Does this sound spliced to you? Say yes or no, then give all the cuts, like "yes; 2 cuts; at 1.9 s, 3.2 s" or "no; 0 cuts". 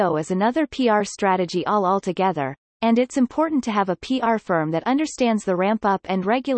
no; 0 cuts